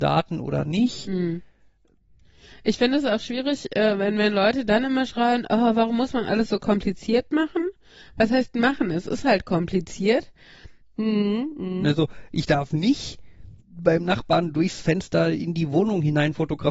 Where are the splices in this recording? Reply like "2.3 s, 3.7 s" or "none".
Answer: 10.8 s, 13.6 s

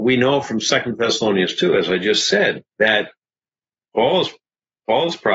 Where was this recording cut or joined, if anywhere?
2.7 s

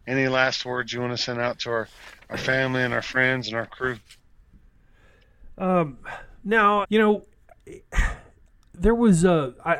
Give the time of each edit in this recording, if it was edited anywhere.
6.8 s

